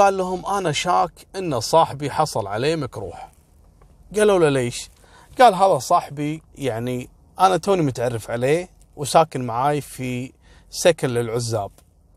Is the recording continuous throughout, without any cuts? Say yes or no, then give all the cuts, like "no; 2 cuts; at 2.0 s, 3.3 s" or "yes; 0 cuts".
no; 1 cut; at 6.5 s